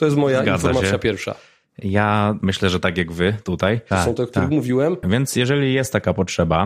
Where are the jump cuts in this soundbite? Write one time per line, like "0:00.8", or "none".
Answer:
0:03.9
0:05.0